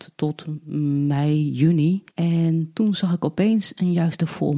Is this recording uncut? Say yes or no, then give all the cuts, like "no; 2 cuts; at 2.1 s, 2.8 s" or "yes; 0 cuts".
no; 1 cut; at 2.1 s